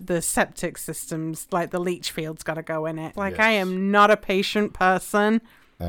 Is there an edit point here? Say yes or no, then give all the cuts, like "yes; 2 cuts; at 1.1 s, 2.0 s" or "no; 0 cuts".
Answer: yes; 1 cut; at 3.1 s